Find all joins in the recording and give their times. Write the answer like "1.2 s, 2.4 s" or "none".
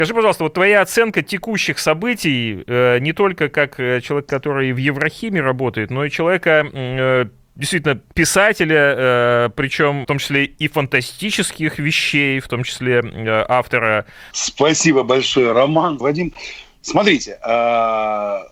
14.3 s, 16.0 s